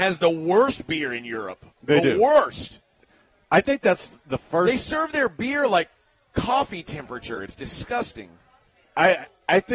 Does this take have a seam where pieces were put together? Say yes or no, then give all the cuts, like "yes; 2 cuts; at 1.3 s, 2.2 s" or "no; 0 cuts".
no; 0 cuts